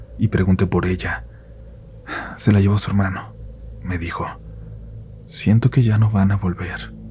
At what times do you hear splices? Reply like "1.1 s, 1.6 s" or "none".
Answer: none